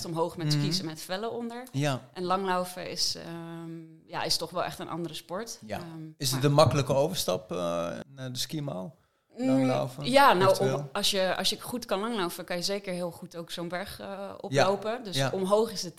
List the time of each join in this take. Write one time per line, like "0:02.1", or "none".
0:08.0